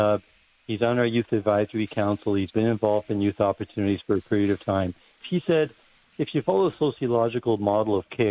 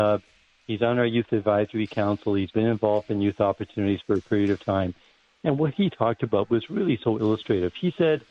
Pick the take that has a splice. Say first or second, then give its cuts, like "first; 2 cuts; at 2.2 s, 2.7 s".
first; 1 cut; at 5.2 s